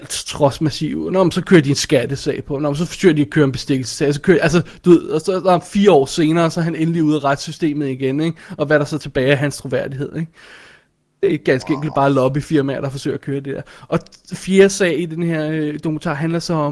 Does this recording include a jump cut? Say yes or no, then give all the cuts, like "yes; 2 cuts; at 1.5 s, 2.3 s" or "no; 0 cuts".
no; 0 cuts